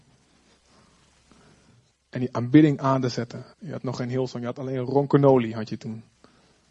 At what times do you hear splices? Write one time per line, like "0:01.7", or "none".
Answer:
0:01.9
0:03.5